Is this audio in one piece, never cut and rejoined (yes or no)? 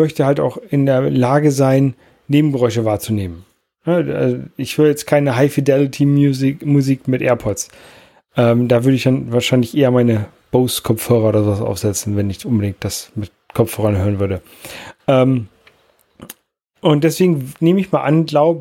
yes